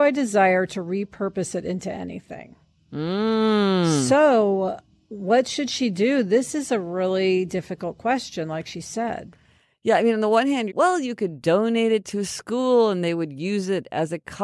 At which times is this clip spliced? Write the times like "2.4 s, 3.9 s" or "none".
10.7 s